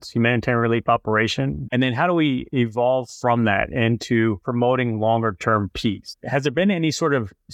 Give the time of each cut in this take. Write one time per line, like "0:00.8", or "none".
0:01.7